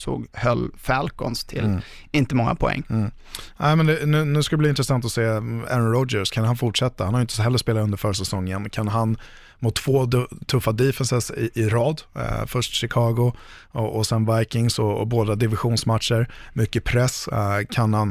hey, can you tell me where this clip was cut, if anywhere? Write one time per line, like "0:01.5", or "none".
none